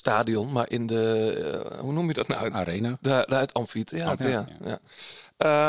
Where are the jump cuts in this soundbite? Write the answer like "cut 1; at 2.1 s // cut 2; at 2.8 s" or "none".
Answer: none

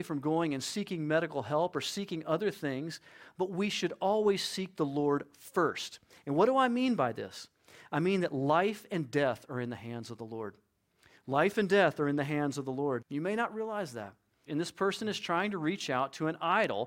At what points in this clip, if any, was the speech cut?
cut 1; at 13.0 s // cut 2; at 14.5 s

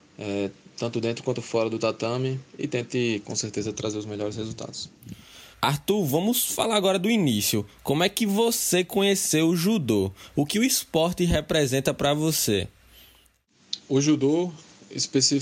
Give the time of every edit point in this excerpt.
cut 1; at 5.5 s

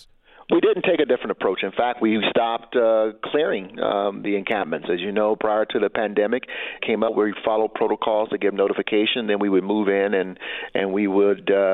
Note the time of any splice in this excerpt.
cut 1; at 6.8 s

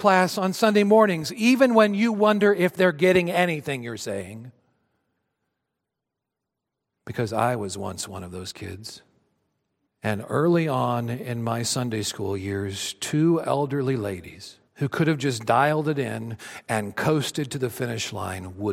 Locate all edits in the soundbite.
cut 1; at 9.9 s // cut 2; at 14.7 s

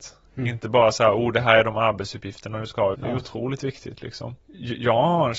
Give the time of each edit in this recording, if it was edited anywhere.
cut 1; at 2.9 s

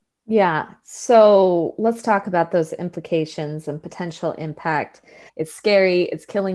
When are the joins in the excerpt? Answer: cut 1; at 5.3 s

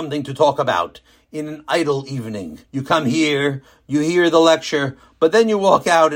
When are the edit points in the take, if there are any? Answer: cut 1; at 2.6 s

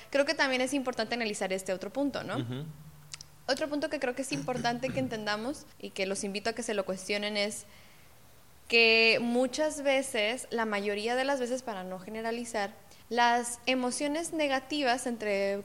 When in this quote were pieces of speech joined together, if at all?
cut 1; at 5.7 s // cut 2; at 13.0 s

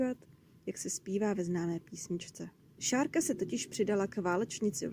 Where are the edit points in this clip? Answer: cut 1; at 2.8 s

